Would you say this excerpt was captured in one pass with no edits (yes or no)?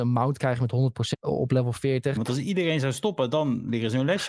no